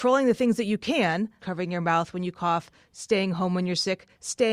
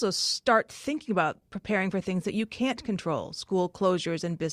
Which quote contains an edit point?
first; 1 cut; at 1.4 s

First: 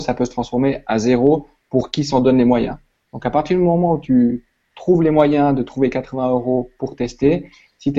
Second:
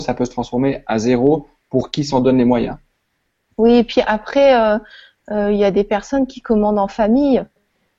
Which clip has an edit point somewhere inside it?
first; 1 cut; at 3.1 s

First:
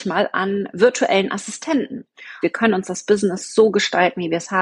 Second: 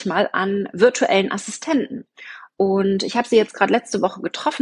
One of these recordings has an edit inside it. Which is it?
first; 1 cut; at 2.4 s

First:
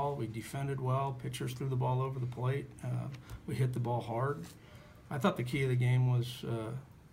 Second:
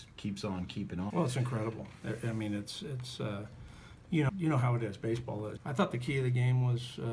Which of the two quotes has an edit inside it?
second; 3 cuts; at 1.1 s, 4.3 s, 5.6 s

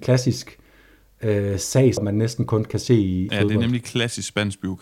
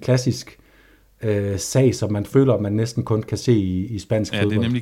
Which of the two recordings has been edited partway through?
first; 2 cuts; at 2.0 s, 3.3 s

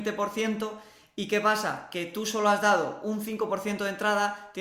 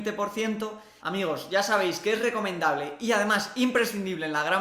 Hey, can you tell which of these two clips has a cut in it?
second; 1 cut; at 1.0 s

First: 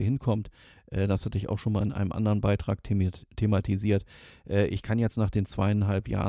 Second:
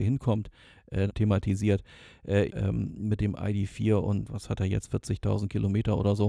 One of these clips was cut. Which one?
second; 2 cuts; at 1.1 s, 2.5 s

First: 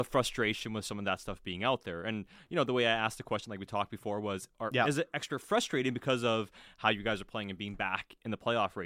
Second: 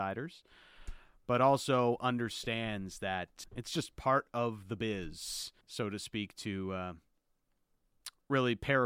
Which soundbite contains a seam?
second; 2 cuts; at 3.4 s, 5.6 s

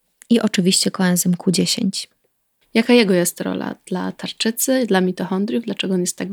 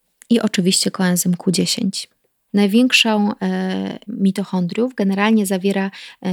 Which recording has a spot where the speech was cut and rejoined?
second; 2 cuts; at 2.5 s, 4.1 s

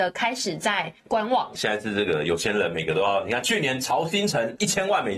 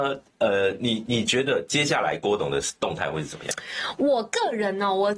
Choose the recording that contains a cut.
first; 1 cut; at 1.5 s

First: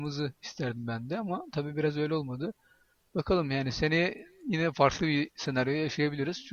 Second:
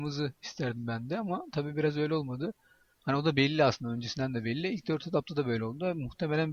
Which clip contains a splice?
second; 1 cut; at 3.0 s

